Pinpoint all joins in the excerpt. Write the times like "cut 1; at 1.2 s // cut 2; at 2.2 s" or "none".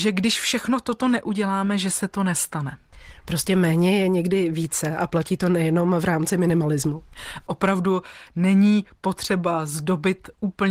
cut 1; at 7.5 s